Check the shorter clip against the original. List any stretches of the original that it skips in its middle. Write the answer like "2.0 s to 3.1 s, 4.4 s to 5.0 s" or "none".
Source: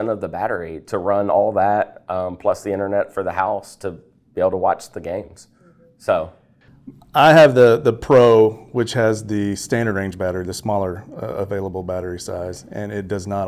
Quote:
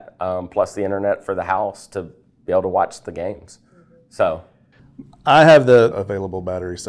7.8 s to 11.3 s

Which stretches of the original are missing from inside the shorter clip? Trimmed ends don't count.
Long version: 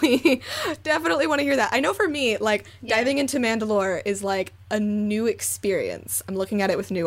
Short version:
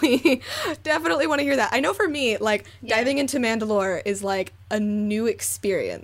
none

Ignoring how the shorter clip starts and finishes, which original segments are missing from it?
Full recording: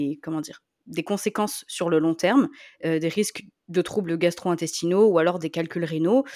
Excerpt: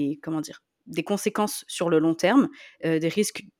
none

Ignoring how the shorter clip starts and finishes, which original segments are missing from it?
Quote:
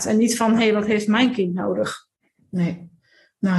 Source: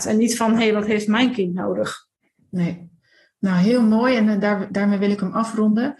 none

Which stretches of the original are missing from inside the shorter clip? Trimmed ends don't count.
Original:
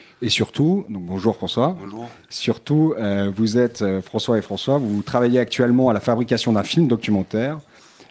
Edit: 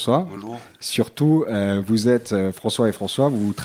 none

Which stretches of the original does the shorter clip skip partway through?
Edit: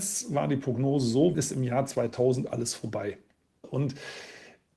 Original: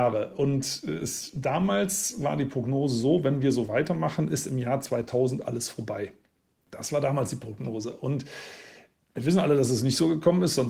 3.2 s to 4.3 s, 6.6 s to 7.9 s

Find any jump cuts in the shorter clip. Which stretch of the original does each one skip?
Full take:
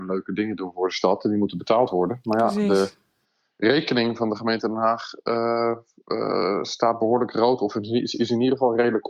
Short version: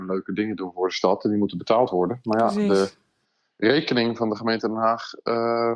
none

